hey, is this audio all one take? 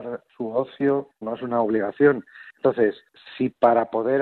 no; 1 cut; at 1.2 s

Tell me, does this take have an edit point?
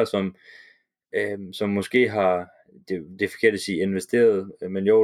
no; 0 cuts

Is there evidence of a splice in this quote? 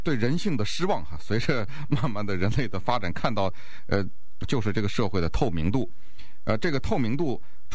yes; 1 cut; at 4.4 s

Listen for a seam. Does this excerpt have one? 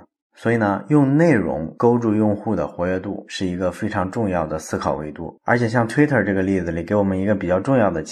yes; 1 cut; at 5.4 s

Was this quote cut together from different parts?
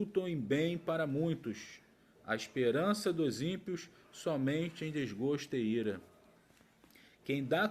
no; 0 cuts

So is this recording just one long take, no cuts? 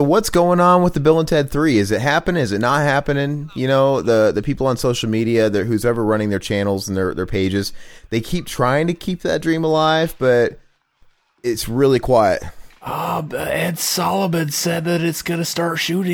yes; 0 cuts

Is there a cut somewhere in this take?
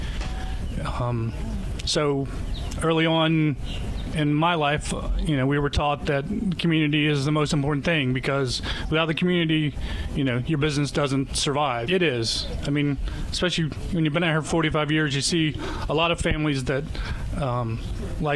yes; 1 cut; at 11.9 s

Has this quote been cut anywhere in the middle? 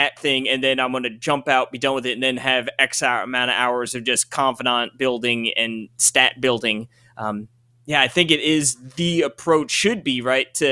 no; 0 cuts

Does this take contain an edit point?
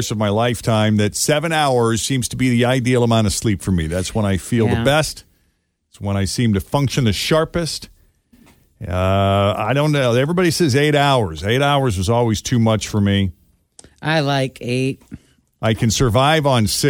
no; 0 cuts

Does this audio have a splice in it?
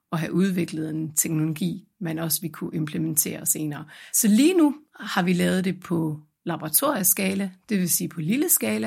yes; 1 cut; at 4.1 s

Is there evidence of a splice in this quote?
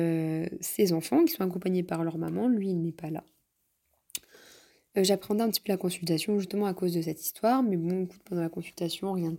no; 0 cuts

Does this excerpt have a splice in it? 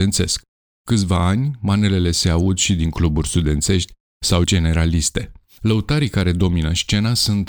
no; 0 cuts

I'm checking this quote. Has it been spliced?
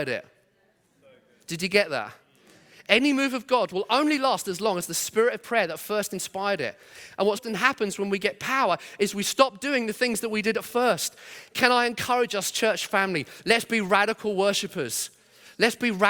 yes; 2 cuts; at 7.3 s, 13.4 s

